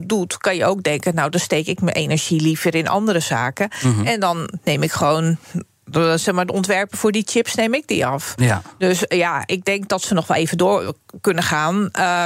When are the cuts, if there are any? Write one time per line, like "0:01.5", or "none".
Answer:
none